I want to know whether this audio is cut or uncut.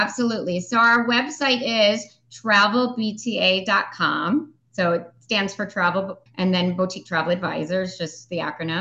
cut